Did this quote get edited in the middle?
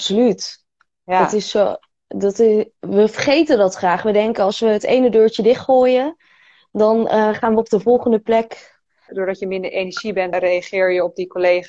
yes; 2 cuts; at 9.1 s, 10.3 s

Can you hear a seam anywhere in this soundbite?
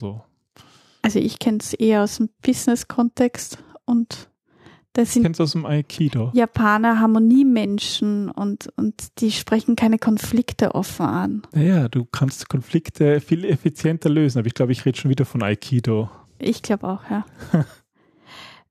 no; 0 cuts

